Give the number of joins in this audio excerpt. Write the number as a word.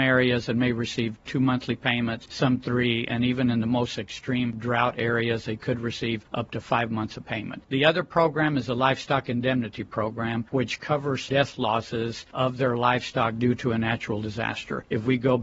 zero